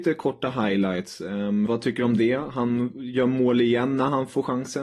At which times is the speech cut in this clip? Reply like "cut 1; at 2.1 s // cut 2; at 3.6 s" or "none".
cut 1; at 1.7 s

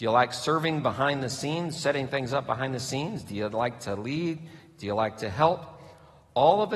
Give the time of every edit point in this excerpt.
none

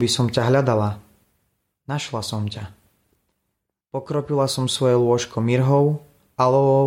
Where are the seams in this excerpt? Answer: cut 1; at 3.8 s

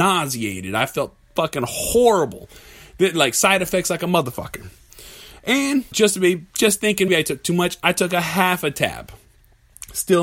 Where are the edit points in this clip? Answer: cut 1; at 5.9 s // cut 2; at 7.1 s

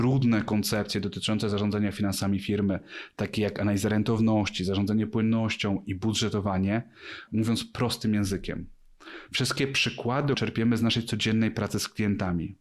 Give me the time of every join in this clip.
cut 1; at 7.3 s // cut 2; at 9.3 s // cut 3; at 10.3 s

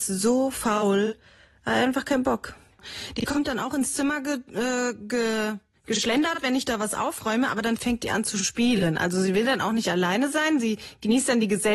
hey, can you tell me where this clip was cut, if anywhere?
none

